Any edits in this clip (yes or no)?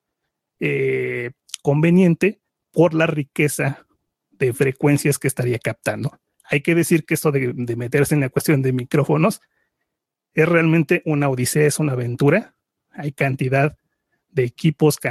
no